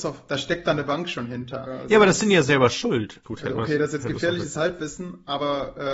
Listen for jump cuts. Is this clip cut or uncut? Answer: cut